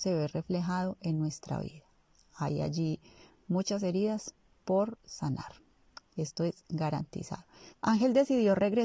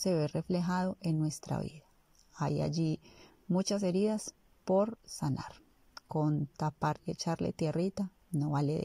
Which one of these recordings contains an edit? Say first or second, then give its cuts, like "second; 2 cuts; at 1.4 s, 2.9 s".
first; 2 cuts; at 6.0 s, 7.7 s